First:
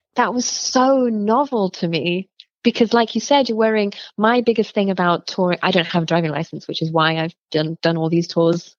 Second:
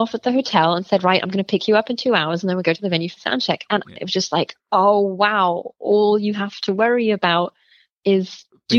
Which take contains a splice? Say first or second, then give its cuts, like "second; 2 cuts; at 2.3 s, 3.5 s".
second; 1 cut; at 4.0 s